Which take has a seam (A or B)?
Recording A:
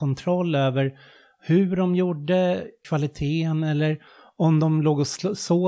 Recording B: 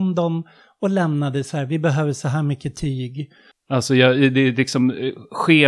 B